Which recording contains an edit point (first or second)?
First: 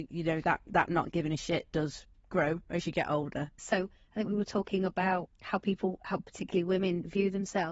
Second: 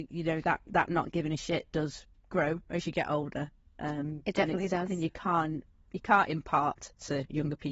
first